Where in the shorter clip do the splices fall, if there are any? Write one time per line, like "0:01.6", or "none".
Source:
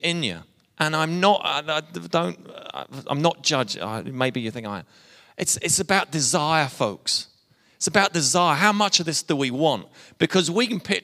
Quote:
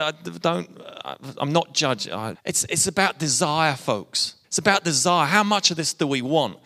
0:02.3
0:04.4